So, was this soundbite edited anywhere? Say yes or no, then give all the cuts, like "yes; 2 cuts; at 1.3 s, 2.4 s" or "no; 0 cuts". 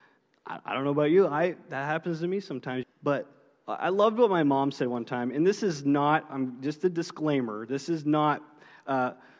yes; 1 cut; at 2.8 s